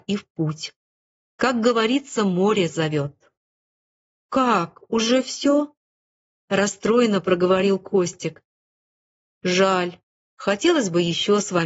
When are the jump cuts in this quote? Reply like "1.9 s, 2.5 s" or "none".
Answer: none